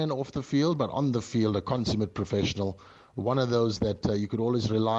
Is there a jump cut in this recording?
no; 0 cuts

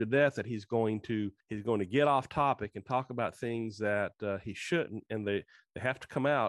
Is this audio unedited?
no; 1 cut; at 1.4 s

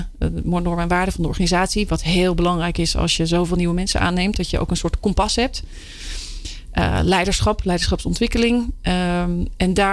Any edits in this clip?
no; 0 cuts

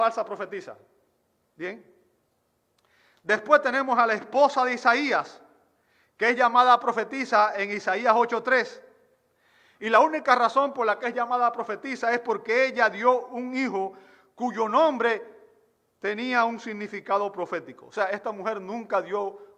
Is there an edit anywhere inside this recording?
no; 0 cuts

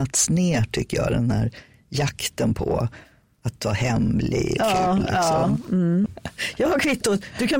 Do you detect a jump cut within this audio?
yes; 2 cuts; at 4.6 s, 6.1 s

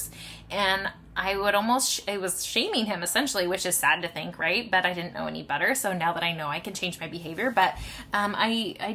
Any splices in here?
no; 0 cuts

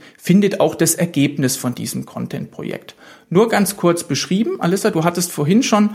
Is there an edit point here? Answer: no; 0 cuts

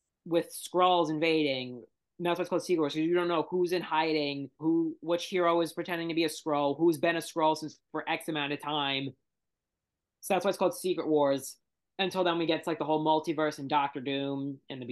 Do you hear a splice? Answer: yes; 1 cut; at 4.6 s

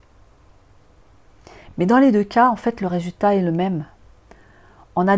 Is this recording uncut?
yes; 0 cuts

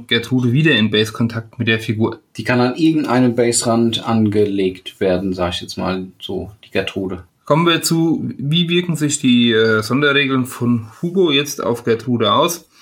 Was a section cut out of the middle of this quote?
yes; 1 cut; at 7.3 s

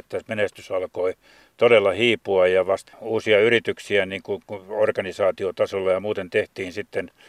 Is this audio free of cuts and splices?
no; 1 cut; at 2.9 s

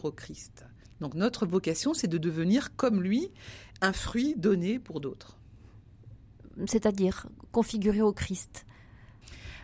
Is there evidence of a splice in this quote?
no; 0 cuts

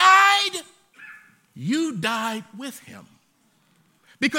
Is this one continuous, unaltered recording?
yes; 0 cuts

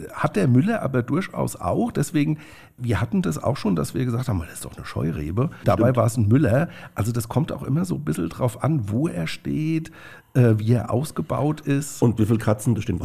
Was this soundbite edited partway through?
no; 0 cuts

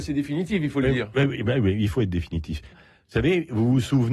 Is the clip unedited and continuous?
no; 1 cut; at 2.7 s

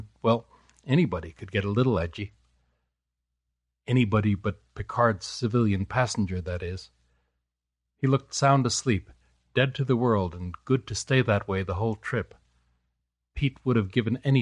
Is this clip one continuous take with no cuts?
yes; 0 cuts

